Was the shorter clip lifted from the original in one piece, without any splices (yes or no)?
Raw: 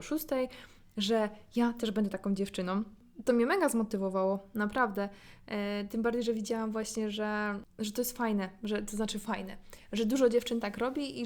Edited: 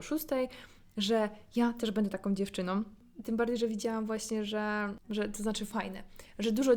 no